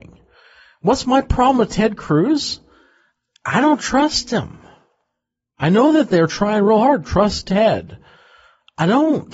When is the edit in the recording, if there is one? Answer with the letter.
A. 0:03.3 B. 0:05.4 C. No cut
C